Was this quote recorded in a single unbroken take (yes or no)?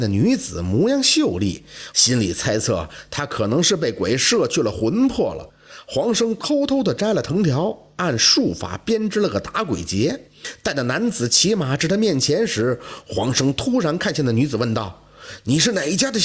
no